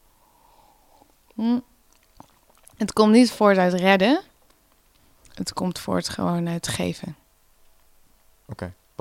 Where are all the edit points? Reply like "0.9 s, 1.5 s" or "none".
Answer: none